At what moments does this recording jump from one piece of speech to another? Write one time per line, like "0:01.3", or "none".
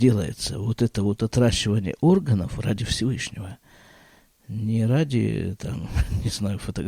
none